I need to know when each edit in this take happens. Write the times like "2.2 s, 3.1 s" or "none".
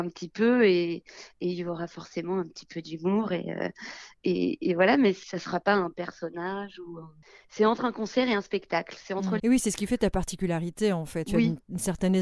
9.4 s, 11.3 s